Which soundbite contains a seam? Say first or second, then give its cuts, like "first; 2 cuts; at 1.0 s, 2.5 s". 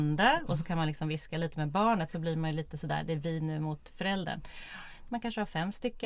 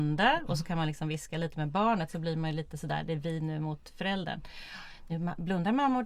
first; 1 cut; at 5.1 s